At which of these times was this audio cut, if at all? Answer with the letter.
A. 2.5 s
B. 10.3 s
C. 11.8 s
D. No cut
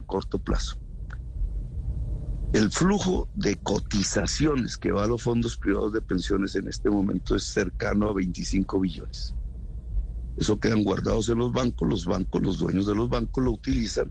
D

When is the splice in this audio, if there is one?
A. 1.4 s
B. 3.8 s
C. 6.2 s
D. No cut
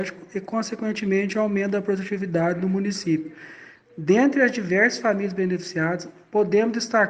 D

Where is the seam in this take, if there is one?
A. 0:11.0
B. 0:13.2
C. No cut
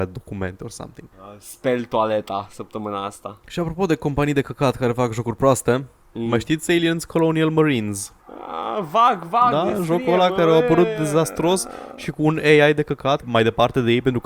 B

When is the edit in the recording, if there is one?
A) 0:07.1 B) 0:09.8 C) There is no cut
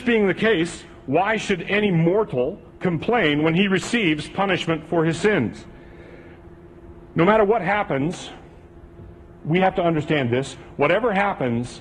C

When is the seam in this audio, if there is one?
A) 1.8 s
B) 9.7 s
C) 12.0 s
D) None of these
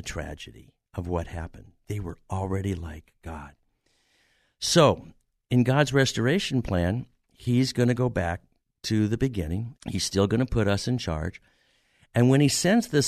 B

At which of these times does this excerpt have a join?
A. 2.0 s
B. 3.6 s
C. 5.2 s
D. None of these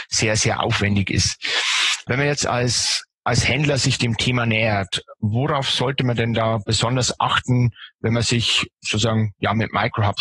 A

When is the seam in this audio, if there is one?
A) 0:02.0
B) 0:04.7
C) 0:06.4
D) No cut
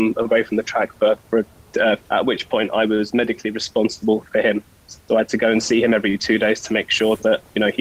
A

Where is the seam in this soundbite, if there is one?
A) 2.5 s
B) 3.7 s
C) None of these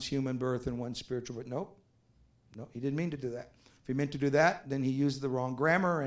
C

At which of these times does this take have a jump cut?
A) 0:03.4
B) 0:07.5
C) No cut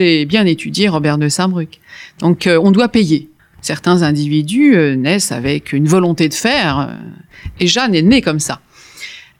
A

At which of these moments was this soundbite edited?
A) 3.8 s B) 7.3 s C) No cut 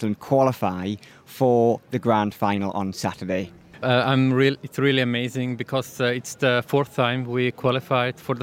A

